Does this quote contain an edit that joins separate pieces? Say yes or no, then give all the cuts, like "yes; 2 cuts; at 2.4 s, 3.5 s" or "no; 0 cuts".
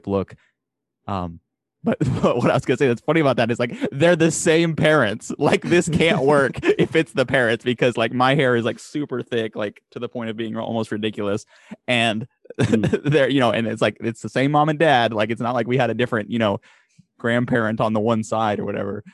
no; 0 cuts